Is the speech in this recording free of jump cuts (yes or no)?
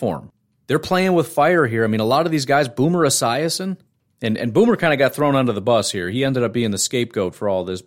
yes